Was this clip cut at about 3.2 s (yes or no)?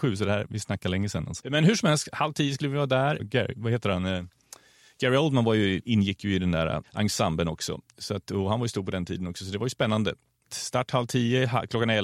yes